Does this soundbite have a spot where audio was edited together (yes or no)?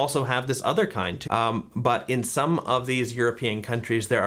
yes